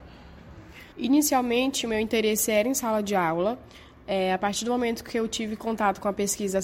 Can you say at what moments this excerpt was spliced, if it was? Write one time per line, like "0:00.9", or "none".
0:00.9